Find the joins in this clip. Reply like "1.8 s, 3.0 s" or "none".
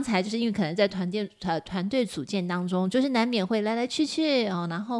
none